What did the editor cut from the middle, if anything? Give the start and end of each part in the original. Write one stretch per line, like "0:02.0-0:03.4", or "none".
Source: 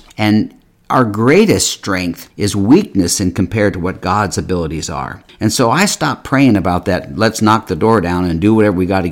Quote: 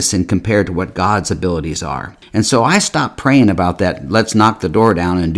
none